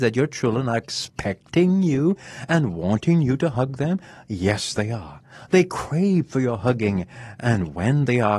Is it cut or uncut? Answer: uncut